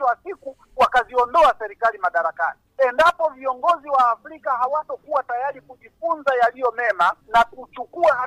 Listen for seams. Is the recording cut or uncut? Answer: uncut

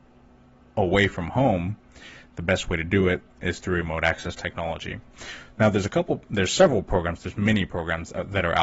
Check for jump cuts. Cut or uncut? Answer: uncut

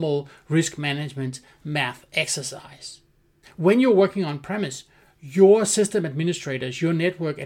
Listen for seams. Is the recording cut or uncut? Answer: cut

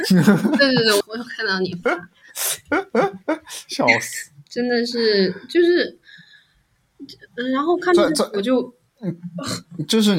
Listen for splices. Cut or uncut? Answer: cut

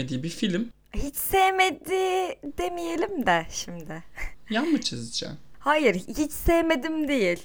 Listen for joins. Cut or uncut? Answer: uncut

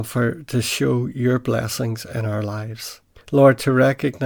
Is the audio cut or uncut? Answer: cut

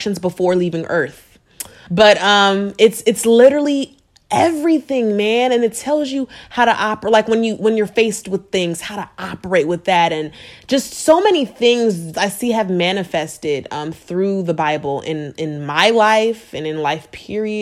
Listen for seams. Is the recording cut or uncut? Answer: cut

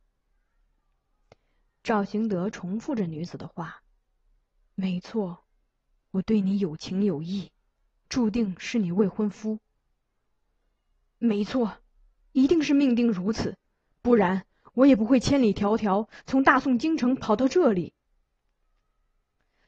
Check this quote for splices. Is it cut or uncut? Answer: uncut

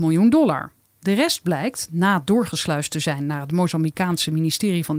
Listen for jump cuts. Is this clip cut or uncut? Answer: uncut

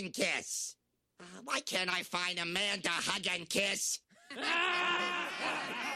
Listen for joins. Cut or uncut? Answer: uncut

